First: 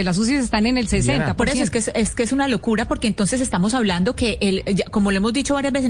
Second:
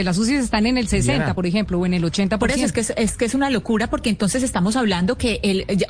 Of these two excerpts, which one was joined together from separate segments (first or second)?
first